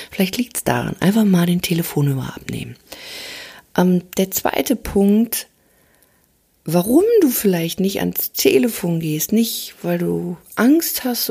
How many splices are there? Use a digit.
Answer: 0